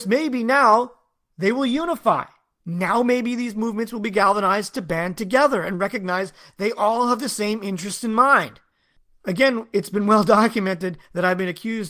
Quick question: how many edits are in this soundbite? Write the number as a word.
zero